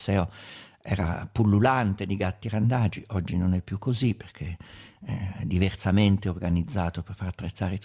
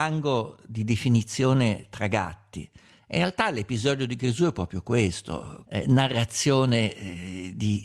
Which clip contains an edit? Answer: second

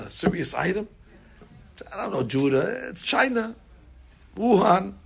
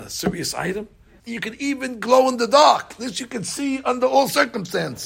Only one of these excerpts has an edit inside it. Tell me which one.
second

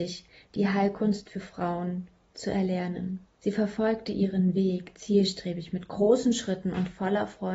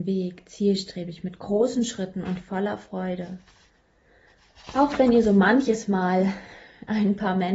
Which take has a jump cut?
first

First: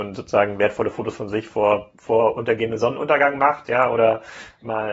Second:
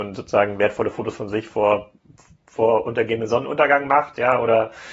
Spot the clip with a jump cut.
first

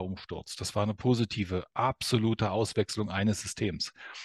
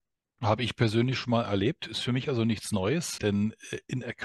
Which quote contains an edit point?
second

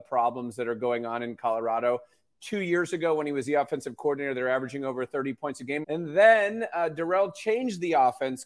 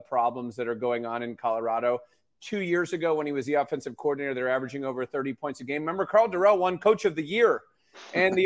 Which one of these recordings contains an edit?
first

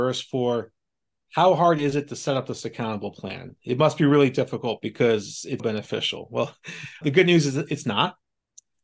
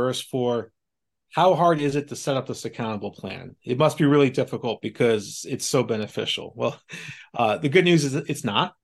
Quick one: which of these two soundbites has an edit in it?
first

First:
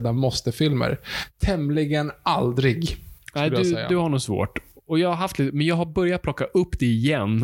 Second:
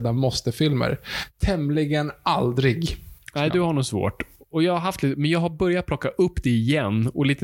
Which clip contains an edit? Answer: second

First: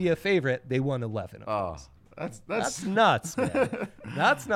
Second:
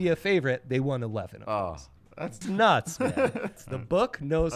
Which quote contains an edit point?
second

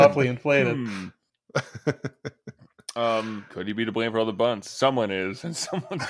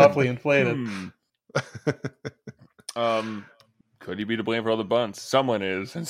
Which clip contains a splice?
first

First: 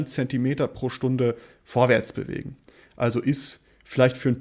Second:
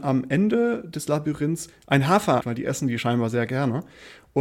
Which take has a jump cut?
second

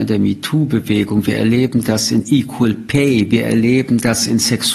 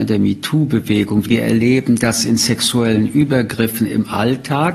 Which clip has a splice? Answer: second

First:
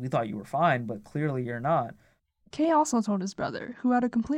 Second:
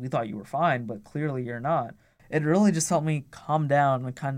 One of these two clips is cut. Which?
second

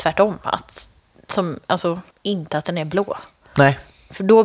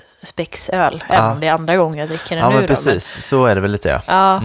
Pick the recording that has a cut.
first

